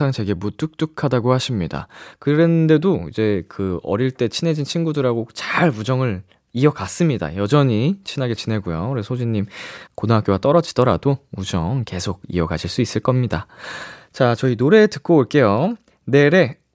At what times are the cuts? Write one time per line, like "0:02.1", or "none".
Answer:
0:02.1
0:09.9